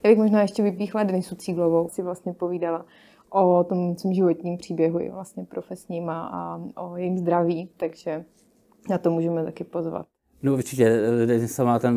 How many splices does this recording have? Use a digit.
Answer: 2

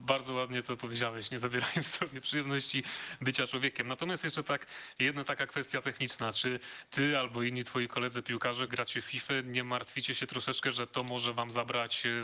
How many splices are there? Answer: 1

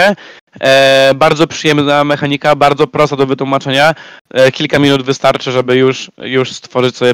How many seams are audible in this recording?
0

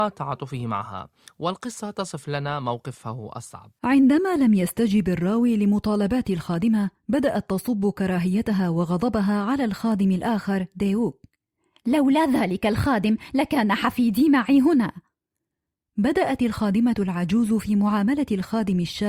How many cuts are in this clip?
1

